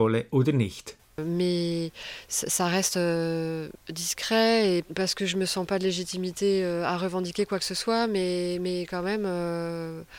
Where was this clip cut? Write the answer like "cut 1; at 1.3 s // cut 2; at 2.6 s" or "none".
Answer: cut 1; at 1.1 s // cut 2; at 3.8 s